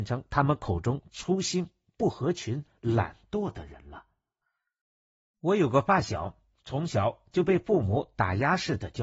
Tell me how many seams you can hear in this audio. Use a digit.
0